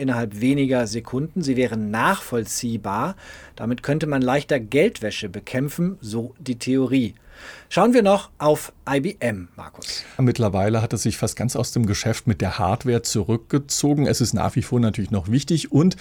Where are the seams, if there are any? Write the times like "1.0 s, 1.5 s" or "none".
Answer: 10.2 s